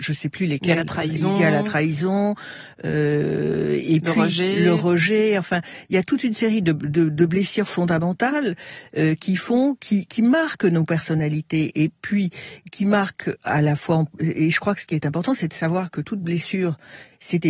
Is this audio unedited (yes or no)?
yes